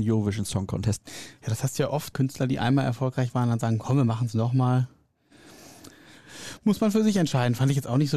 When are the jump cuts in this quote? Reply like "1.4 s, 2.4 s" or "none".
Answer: 1.0 s, 2.1 s